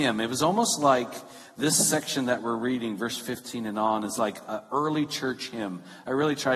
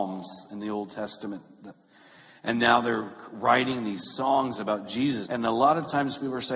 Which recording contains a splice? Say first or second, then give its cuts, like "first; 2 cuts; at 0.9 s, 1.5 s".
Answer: second; 1 cut; at 5.3 s